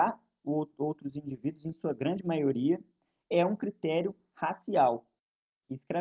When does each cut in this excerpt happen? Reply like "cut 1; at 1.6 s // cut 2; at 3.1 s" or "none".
none